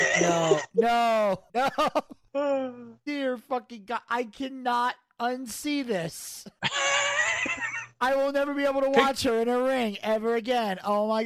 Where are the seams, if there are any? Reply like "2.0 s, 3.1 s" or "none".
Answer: none